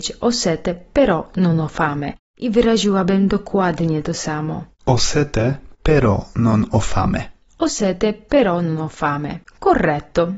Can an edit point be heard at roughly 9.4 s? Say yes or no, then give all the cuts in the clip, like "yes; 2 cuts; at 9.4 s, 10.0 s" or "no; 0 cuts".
yes; 1 cut; at 9.4 s